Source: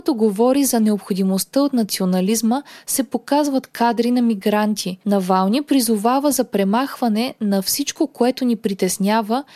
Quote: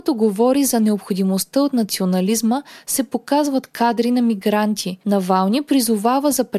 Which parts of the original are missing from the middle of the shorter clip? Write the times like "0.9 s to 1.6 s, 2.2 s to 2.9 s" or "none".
none